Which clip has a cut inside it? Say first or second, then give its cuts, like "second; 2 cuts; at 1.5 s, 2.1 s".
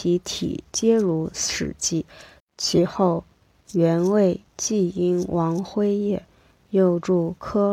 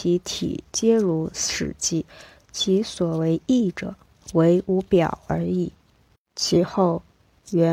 first; 1 cut; at 2.4 s